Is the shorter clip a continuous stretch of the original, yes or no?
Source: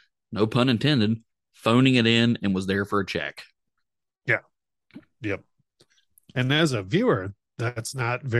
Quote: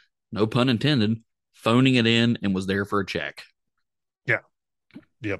yes